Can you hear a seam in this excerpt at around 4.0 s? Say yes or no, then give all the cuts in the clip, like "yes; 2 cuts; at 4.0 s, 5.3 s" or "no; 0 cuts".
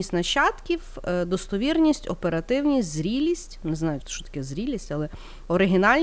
yes; 1 cut; at 4.0 s